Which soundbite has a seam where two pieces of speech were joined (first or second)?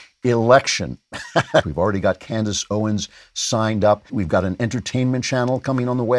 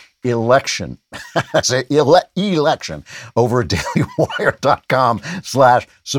first